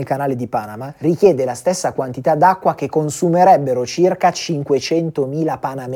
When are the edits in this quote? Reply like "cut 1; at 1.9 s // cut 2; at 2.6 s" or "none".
none